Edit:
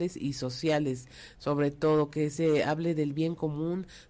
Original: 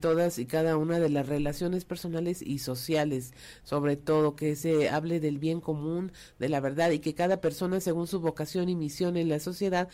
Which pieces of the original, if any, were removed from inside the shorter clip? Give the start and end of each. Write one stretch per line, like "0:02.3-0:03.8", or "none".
none